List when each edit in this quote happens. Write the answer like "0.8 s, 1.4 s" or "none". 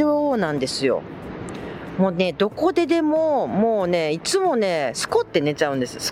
none